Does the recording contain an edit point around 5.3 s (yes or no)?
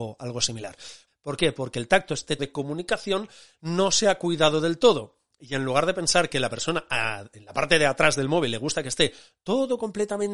no